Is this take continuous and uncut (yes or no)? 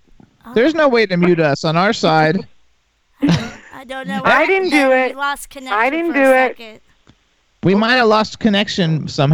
yes